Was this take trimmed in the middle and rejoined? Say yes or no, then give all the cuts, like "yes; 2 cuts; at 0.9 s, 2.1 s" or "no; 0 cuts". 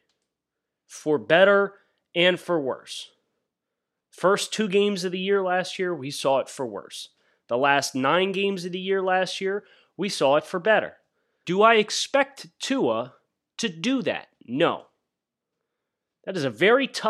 yes; 1 cut; at 11.4 s